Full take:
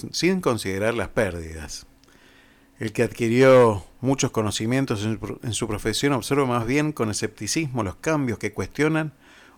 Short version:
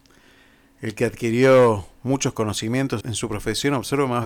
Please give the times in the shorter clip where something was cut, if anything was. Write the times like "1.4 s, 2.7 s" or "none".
3.0 s